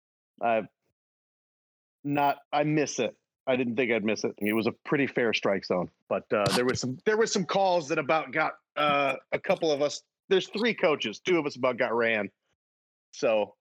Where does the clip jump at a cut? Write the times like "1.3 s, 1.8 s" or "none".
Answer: 2.4 s, 4.4 s, 6.0 s